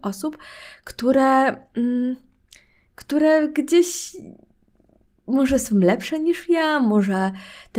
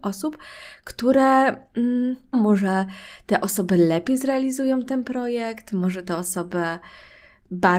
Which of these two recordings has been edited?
second; 1 cut; at 2.3 s

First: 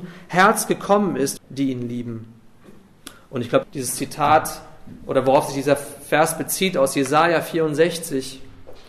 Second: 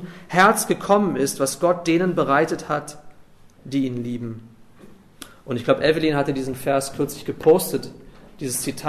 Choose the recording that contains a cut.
first; 2 cuts; at 1.4 s, 3.6 s

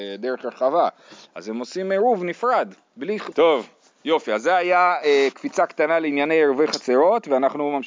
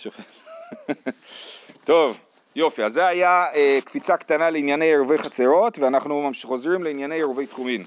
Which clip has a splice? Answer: first; 1 cut; at 3.3 s

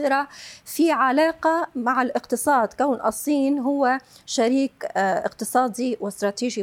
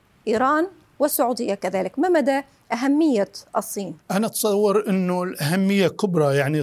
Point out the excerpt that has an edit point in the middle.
second; 1 cut; at 4.0 s

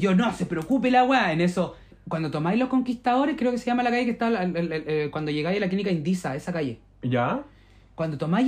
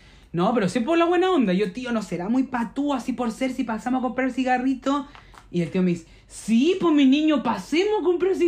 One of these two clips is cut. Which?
first; 1 cut; at 1.9 s

